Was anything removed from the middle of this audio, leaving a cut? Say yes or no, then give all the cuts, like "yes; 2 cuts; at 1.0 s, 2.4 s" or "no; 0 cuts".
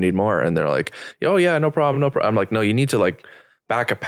no; 0 cuts